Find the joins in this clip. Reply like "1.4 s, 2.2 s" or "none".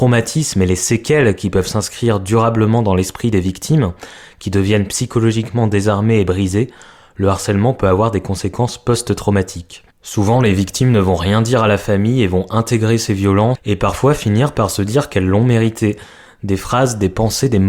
9.9 s, 13.6 s